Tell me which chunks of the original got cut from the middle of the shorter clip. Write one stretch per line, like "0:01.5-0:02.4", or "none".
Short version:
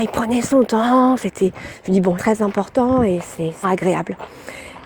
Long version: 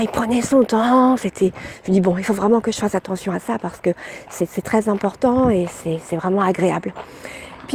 0:02.2-0:04.6
0:06.1-0:06.4